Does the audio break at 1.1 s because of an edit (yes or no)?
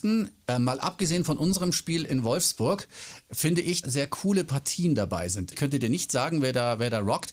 no